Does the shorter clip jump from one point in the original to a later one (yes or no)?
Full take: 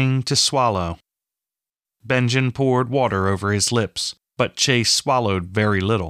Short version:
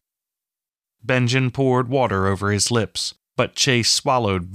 no